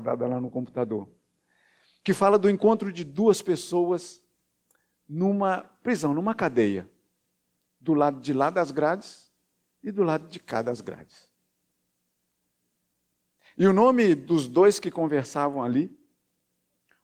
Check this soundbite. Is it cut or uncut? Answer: uncut